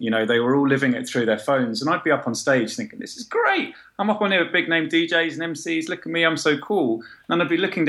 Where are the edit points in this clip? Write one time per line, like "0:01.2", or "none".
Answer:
none